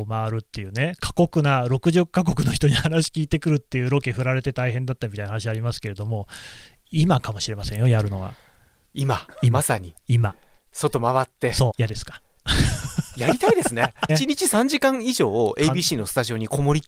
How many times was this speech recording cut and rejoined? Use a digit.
2